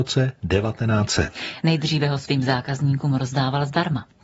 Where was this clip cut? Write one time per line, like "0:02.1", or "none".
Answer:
none